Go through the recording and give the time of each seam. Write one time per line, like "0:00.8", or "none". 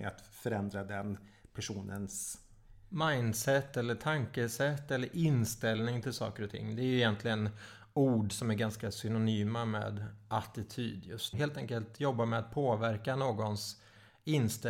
0:11.3